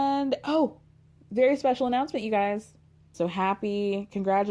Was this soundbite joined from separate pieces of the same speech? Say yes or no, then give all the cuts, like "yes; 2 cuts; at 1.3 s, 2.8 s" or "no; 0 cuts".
yes; 1 cut; at 3.1 s